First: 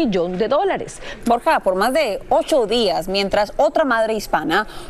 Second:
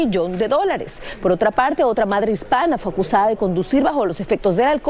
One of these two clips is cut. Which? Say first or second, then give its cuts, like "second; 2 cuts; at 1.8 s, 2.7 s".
first; 1 cut; at 1.2 s